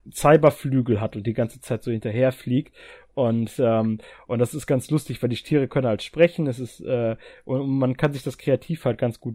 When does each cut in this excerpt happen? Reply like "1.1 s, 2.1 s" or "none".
none